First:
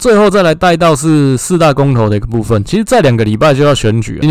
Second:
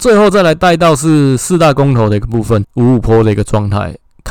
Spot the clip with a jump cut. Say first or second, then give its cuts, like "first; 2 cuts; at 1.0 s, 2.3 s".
second; 1 cut; at 2.6 s